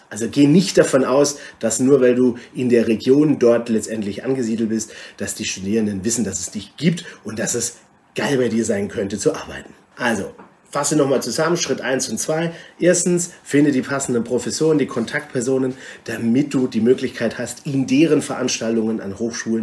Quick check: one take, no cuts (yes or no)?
no